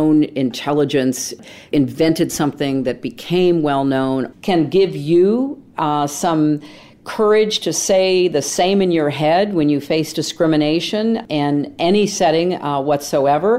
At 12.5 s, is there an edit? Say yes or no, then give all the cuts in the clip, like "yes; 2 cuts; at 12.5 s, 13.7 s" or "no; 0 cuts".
no; 1 cut; at 4.3 s